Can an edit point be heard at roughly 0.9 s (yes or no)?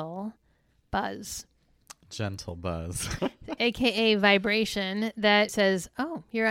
no